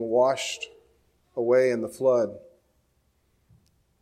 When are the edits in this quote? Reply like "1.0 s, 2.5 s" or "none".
none